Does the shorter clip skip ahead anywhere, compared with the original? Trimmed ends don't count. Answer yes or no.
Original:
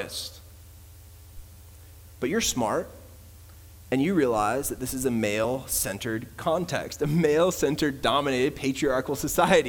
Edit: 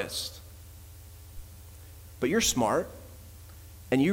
no